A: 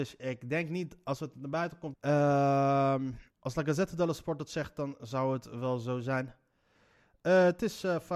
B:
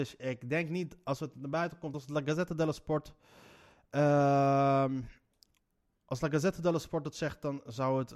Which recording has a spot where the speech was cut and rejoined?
A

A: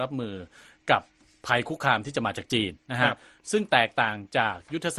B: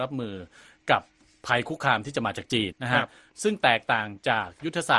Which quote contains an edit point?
B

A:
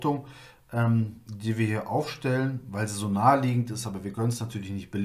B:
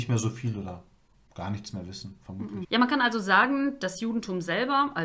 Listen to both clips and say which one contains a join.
B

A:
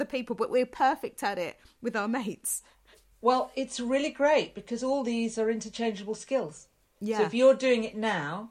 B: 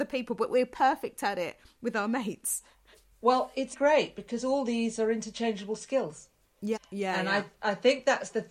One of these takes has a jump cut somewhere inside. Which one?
B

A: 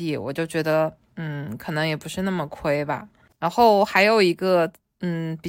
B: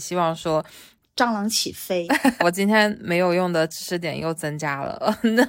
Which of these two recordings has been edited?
B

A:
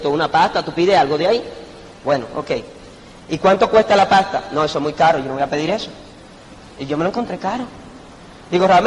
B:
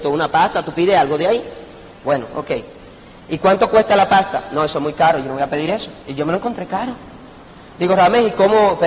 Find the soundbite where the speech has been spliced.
B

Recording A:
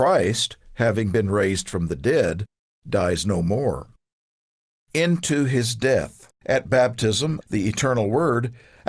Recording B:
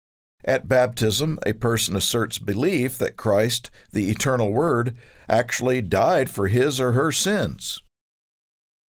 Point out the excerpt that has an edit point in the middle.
A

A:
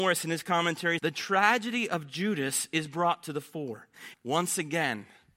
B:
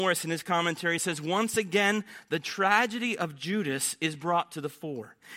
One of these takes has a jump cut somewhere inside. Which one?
A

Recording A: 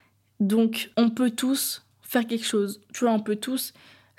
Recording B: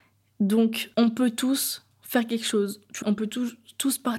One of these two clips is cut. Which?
B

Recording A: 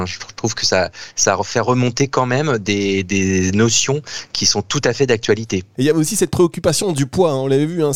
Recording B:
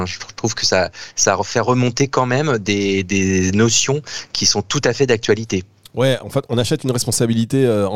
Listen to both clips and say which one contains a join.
A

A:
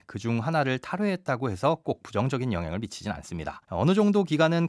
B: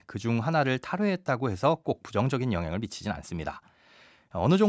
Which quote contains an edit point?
A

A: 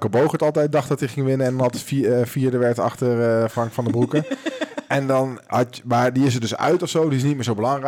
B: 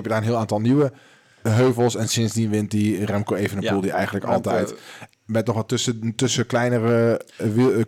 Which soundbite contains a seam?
B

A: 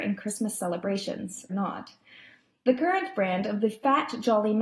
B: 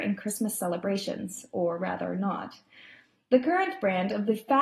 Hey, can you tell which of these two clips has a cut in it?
A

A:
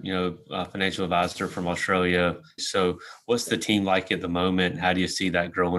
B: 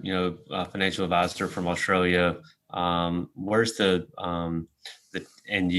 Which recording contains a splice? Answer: A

